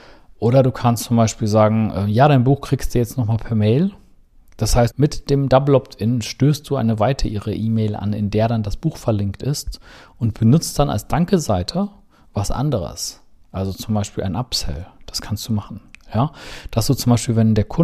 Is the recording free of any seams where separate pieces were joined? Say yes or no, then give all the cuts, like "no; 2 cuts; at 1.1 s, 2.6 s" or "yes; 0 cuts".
no; 1 cut; at 4.9 s